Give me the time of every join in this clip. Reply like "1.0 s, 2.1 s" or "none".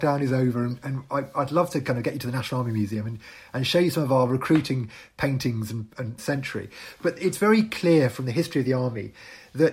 6.2 s